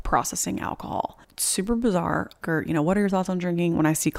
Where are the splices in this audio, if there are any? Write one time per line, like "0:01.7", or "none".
0:01.2
0:02.4